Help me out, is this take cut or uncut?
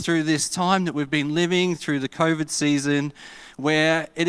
uncut